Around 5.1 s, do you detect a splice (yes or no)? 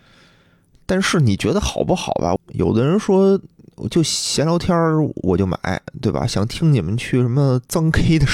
no